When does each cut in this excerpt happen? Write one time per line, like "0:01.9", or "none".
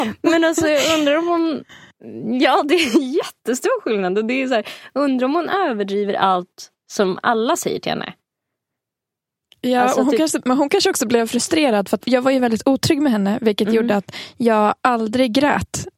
0:12.0